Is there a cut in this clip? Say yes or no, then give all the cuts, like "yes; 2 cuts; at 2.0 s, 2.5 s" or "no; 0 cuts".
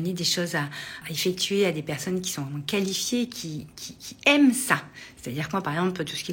yes; 1 cut; at 1.0 s